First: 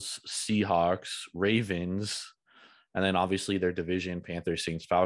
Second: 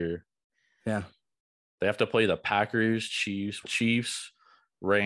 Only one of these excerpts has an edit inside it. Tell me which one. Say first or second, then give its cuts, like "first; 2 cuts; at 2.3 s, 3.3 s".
second; 1 cut; at 3.6 s